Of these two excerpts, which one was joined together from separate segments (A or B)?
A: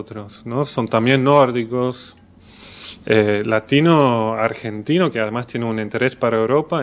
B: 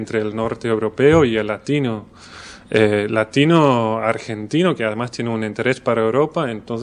A